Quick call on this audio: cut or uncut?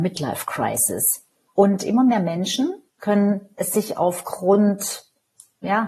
cut